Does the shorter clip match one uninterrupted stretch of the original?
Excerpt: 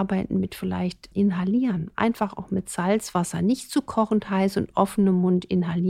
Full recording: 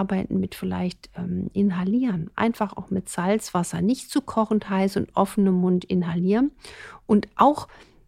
no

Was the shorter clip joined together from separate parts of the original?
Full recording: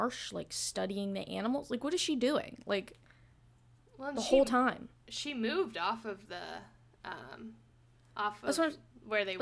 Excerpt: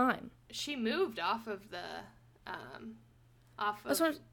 no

